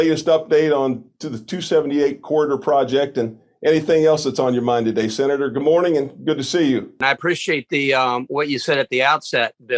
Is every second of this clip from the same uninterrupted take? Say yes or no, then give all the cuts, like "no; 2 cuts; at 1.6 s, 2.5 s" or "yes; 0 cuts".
yes; 0 cuts